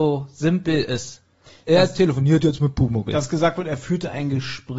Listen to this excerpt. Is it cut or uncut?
uncut